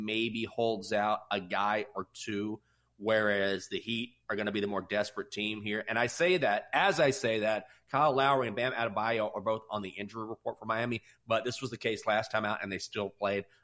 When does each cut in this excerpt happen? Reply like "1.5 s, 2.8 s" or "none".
none